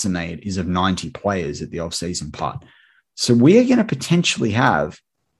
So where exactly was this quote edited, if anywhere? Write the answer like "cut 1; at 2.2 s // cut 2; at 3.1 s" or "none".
none